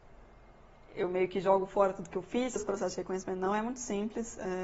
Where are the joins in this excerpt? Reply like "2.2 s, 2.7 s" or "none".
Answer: 2.6 s